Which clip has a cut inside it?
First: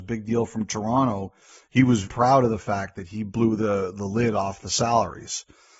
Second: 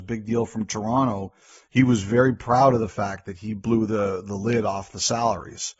first; 1 cut; at 2.0 s

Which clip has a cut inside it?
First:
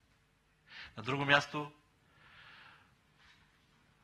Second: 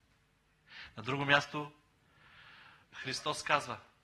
second; 1 cut; at 2.8 s

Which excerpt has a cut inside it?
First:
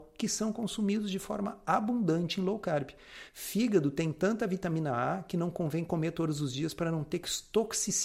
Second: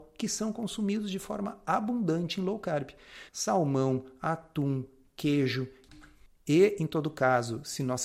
second; 1 cut; at 3.3 s

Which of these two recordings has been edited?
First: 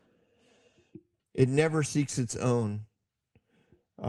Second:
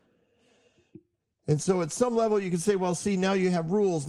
first; 1 cut; at 1.2 s

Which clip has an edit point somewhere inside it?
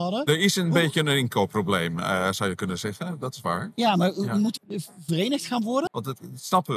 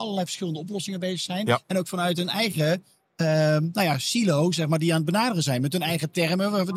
first; 2 cuts; at 4.6 s, 5.9 s

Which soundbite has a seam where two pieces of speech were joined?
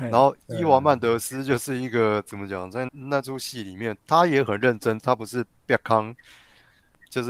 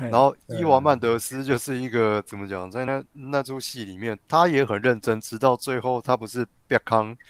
first; 2 cuts; at 2.9 s, 5.0 s

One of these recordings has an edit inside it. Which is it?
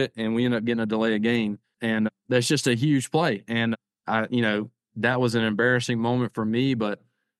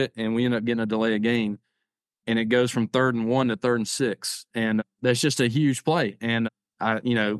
first; 1 cut; at 1.7 s

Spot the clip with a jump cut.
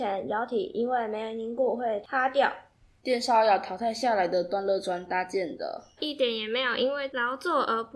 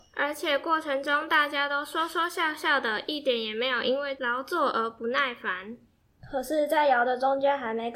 first; 2 cuts; at 3.0 s, 6.0 s

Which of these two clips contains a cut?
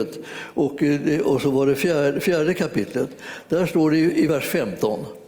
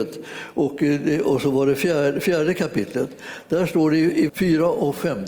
second; 1 cut; at 4.3 s

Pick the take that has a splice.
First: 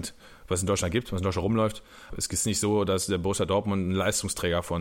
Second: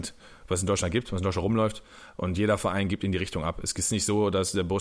first; 1 cut; at 2.1 s

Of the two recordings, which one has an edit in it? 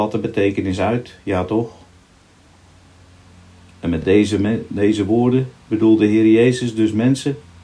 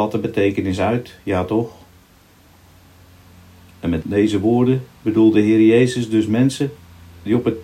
second; 1 cut; at 4.0 s

